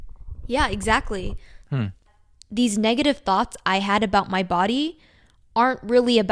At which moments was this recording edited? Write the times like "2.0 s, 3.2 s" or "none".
1.6 s